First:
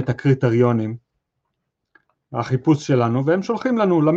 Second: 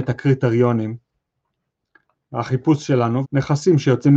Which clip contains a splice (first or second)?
second